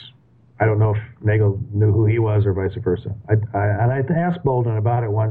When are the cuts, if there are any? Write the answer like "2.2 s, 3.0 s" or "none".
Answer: none